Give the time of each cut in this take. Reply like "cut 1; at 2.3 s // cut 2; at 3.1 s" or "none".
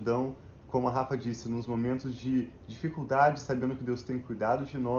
none